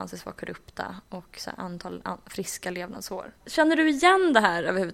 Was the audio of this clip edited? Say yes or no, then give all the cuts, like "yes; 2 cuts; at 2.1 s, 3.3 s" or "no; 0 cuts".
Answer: yes; 1 cut; at 3.4 s